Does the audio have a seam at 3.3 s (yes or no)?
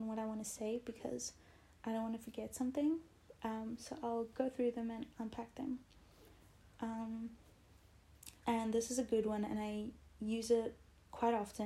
no